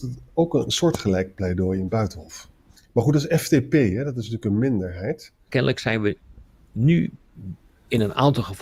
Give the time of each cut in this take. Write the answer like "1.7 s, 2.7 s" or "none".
2.8 s, 5.5 s